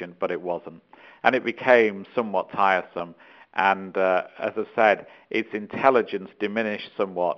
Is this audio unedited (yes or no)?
yes